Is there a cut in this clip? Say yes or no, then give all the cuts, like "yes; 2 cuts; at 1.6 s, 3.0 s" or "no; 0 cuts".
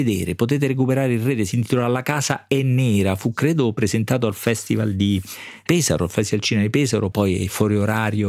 yes; 1 cut; at 7.1 s